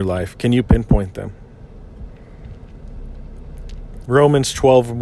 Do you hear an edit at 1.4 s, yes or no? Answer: no